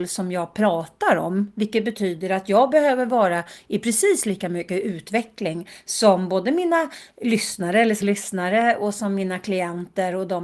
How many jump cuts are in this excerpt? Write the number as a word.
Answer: one